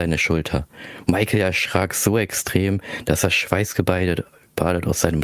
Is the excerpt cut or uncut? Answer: uncut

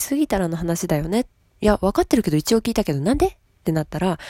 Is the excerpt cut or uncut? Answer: cut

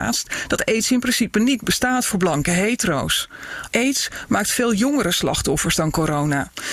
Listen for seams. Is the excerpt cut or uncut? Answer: cut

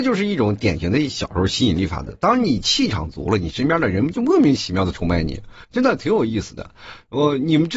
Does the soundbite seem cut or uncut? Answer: uncut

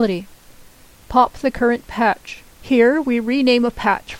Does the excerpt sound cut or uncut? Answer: cut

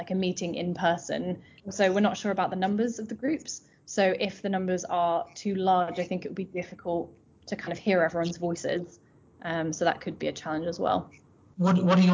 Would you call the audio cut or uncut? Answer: uncut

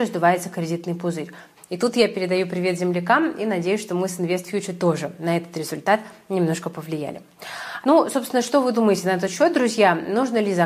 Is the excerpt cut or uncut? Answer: cut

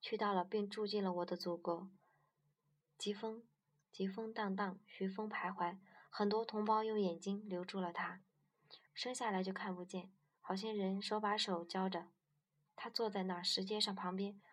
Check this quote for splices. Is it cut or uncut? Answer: cut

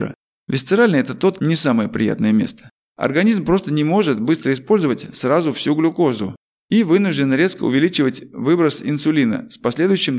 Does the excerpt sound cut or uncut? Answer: cut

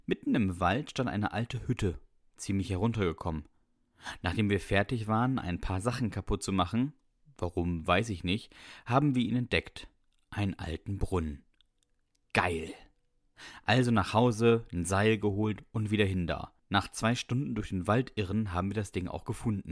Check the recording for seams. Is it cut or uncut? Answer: cut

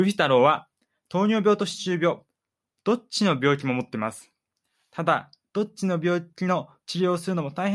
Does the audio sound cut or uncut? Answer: uncut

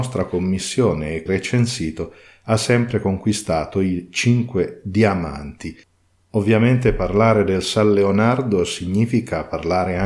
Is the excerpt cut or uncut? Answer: cut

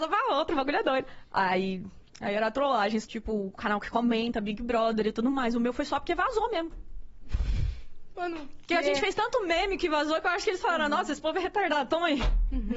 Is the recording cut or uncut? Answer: cut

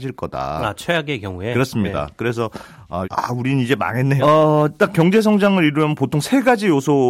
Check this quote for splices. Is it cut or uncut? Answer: cut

